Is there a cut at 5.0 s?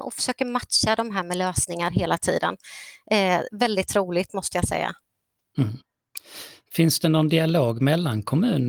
no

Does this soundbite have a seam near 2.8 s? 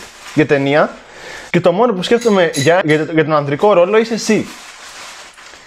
yes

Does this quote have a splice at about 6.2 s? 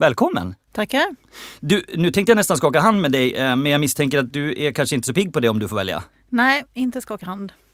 no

